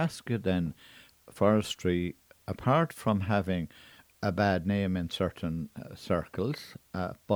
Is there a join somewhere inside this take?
no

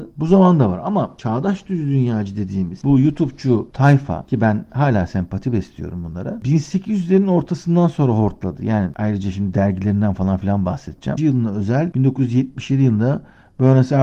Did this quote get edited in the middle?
yes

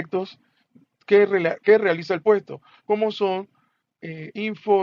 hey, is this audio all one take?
yes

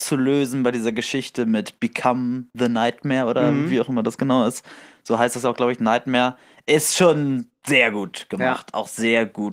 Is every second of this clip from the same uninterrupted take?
yes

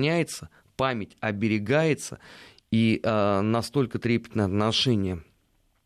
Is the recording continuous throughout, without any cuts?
yes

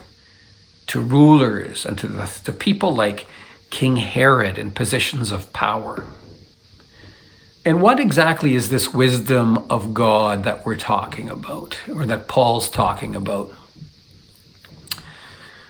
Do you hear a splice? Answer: yes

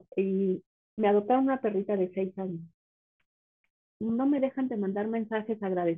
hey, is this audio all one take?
yes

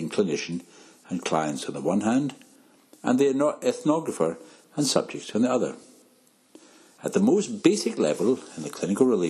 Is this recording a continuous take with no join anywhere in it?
yes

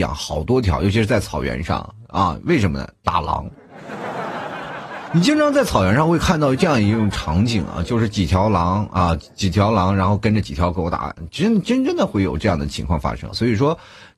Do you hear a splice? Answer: yes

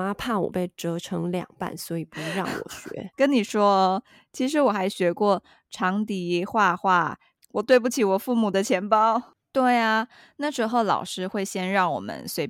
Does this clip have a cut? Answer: yes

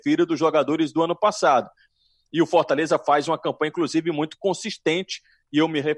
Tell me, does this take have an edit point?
no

